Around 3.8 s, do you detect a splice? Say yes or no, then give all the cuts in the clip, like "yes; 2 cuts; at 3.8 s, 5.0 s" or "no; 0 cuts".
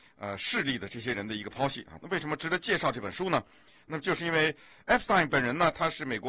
no; 1 cut; at 2.0 s